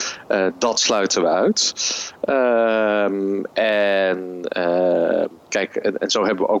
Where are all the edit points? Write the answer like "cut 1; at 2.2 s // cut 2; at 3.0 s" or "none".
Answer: cut 1; at 5.4 s